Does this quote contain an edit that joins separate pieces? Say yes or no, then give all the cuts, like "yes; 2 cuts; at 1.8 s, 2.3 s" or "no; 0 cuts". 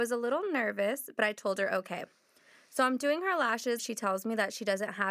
yes; 1 cut; at 3.8 s